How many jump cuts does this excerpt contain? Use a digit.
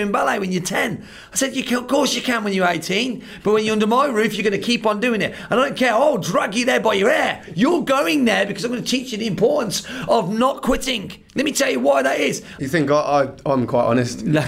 2